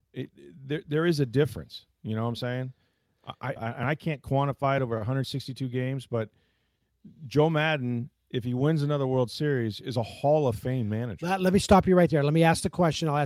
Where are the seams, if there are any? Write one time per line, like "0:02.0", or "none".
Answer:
0:03.6